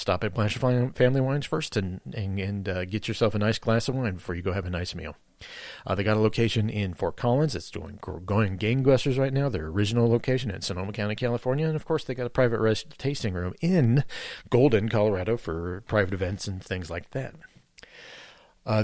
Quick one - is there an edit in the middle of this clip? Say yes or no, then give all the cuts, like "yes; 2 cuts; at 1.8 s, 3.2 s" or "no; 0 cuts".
no; 0 cuts